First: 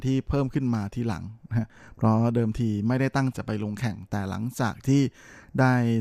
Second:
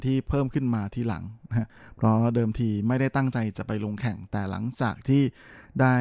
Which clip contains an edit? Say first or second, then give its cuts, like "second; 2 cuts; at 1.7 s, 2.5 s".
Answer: first; 1 cut; at 3.3 s